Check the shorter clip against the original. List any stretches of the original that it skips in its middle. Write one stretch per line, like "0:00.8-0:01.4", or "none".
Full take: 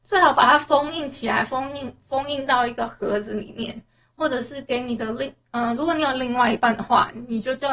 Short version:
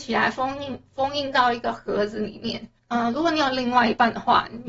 0:03.9-0:05.4